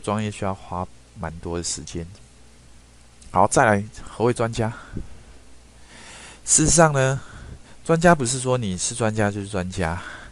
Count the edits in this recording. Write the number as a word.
zero